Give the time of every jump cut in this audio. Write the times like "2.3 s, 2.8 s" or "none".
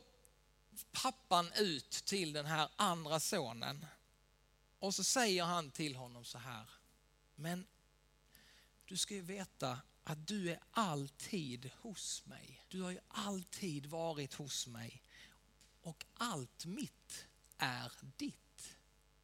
12.7 s

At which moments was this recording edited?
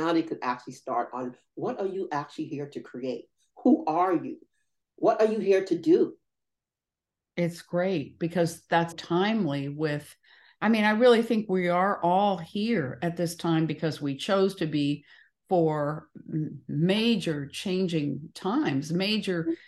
8.9 s

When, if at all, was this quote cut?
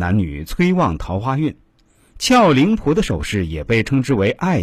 none

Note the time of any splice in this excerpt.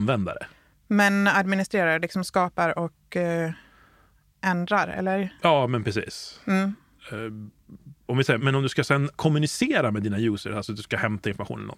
none

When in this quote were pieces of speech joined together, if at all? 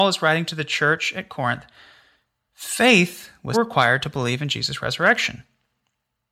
3.5 s

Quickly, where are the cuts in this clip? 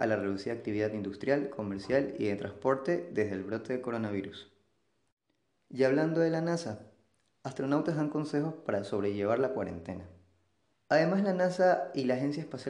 10.7 s

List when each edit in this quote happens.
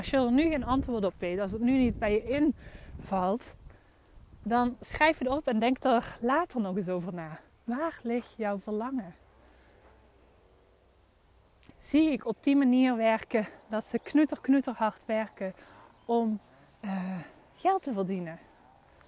11.7 s

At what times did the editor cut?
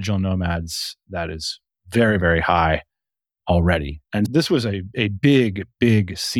4.3 s

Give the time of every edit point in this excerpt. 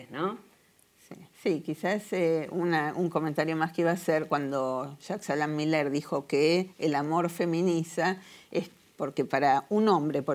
1.3 s

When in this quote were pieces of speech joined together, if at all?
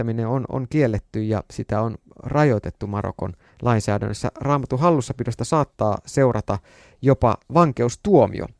none

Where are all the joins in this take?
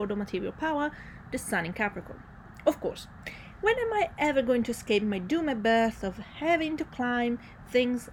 none

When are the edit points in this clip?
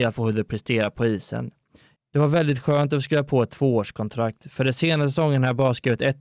2.0 s

